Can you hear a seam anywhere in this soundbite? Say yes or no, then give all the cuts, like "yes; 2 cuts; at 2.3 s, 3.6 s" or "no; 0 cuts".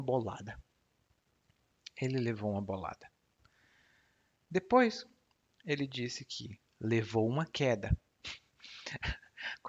no; 0 cuts